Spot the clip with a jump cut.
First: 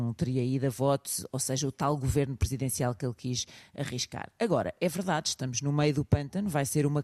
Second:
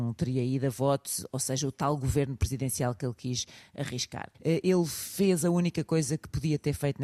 second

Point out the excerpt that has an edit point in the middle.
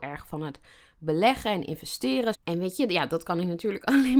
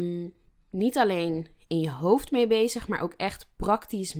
first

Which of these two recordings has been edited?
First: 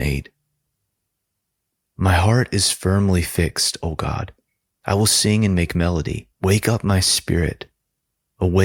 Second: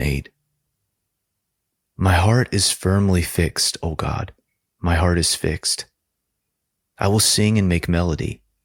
first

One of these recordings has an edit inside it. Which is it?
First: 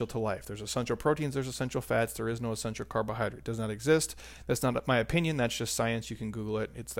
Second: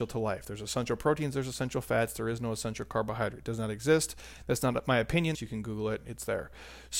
second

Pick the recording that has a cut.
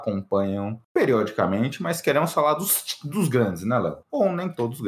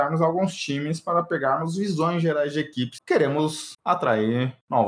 second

